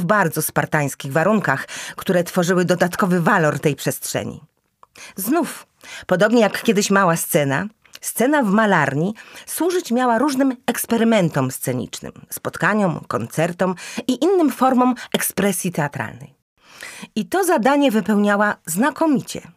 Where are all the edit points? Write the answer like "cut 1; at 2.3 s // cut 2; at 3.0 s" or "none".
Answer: none